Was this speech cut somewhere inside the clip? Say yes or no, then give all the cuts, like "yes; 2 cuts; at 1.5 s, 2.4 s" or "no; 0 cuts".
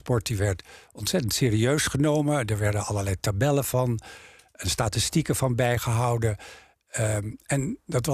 no; 0 cuts